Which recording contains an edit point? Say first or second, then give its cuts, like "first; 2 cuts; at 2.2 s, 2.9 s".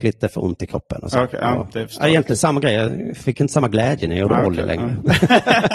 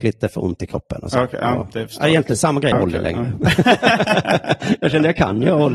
second; 1 cut; at 2.7 s